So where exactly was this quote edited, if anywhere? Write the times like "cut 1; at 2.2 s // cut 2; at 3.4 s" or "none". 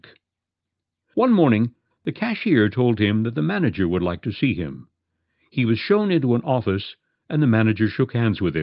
cut 1; at 1.9 s